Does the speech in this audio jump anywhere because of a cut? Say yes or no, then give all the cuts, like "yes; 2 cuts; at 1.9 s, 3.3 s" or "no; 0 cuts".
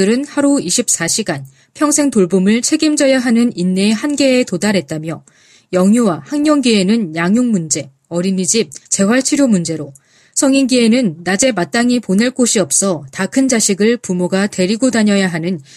yes; 1 cut; at 8.8 s